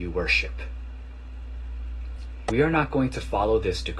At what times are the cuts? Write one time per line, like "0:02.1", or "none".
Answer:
0:02.5